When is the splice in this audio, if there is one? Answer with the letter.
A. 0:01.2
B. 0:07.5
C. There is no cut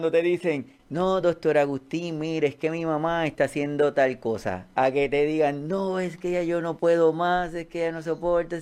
C